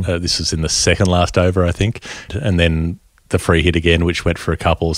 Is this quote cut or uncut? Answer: cut